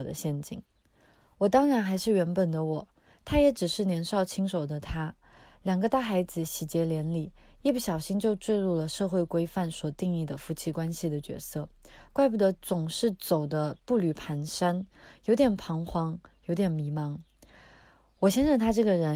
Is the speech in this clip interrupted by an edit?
no; 0 cuts

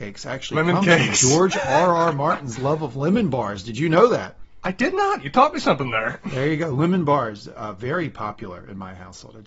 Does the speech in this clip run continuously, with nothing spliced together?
yes; 0 cuts

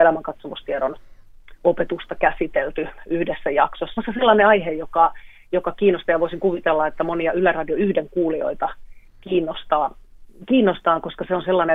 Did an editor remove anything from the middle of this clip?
yes; 1 cut; at 4.0 s

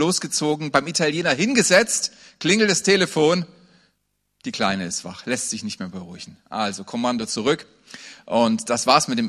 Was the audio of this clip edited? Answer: no; 0 cuts

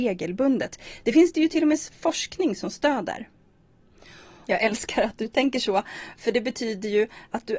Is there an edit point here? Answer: yes; 1 cut; at 4.4 s

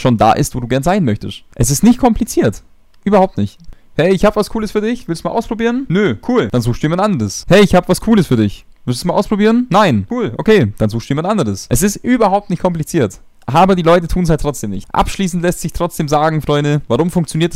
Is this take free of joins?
yes; 0 cuts

